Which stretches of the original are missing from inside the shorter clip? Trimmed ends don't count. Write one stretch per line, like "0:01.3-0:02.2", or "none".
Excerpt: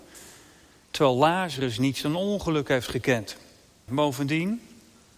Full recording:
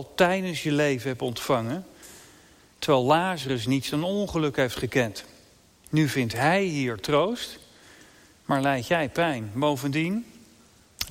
0:05.8-0:09.5